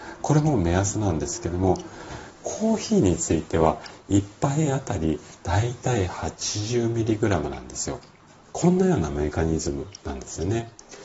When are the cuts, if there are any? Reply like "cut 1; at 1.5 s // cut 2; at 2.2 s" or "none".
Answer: cut 1; at 8.5 s